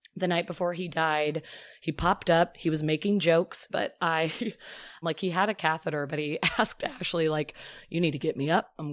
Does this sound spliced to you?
yes; 2 cuts; at 3.7 s, 5.0 s

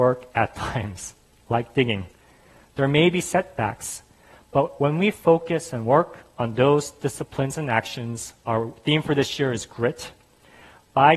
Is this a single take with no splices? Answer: yes; 0 cuts

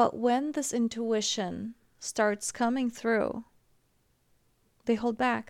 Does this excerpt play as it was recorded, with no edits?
yes; 0 cuts

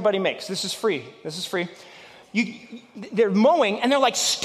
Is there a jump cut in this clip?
no; 0 cuts

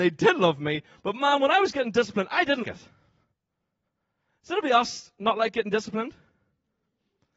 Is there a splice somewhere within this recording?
yes; 1 cut; at 2.6 s

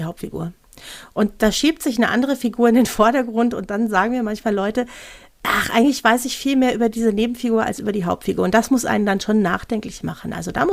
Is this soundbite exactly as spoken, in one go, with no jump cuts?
yes; 0 cuts

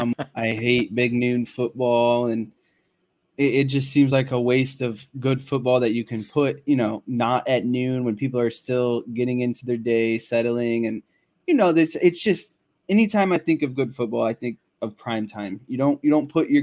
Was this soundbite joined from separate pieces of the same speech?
no; 0 cuts

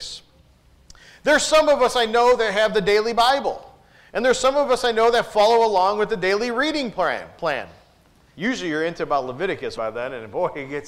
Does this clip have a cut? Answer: yes; 2 cuts; at 8.3 s, 9.8 s

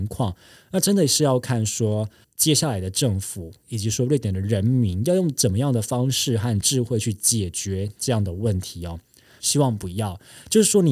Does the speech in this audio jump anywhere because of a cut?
yes; 2 cuts; at 2.2 s, 9.4 s

